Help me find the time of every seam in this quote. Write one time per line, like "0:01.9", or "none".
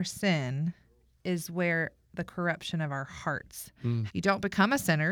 0:04.1